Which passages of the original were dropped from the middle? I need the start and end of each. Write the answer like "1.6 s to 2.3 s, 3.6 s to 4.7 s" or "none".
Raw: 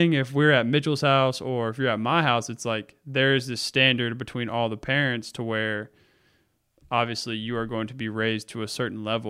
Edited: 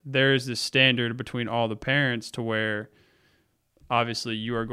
none